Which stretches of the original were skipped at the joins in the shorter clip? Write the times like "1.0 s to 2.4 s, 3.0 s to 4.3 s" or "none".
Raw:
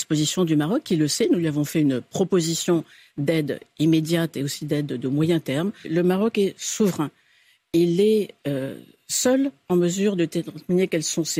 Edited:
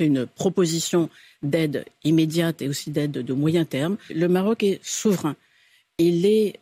none